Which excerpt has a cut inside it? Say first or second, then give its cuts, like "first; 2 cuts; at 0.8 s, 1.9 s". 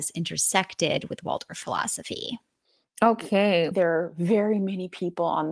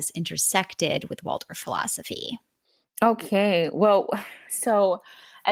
first; 1 cut; at 3.7 s